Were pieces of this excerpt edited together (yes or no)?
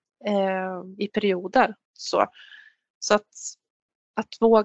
yes